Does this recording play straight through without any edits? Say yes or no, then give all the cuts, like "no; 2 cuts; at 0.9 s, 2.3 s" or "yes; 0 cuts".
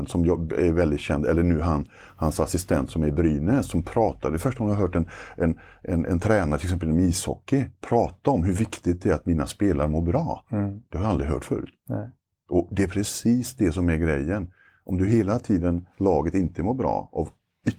yes; 0 cuts